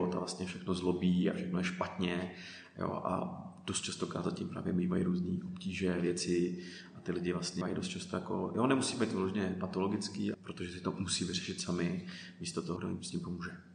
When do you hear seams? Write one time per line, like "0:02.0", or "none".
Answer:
0:07.6
0:10.3
0:12.8